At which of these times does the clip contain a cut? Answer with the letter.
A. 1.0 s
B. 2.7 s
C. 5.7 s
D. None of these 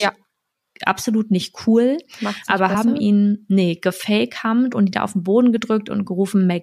D